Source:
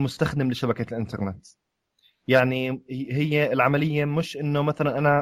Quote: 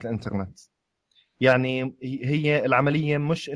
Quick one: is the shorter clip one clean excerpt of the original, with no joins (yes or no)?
yes